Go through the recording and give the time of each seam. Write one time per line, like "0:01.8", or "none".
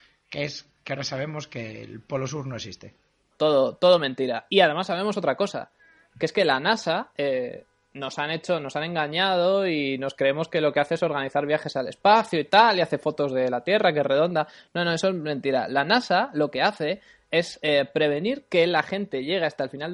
0:03.3